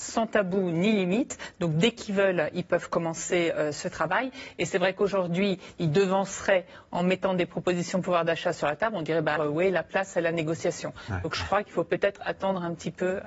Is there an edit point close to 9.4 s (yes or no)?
yes